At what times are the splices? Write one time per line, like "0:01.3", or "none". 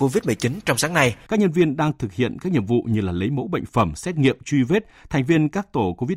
0:01.3